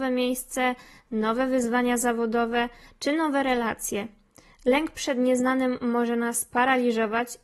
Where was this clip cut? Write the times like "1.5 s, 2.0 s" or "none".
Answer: none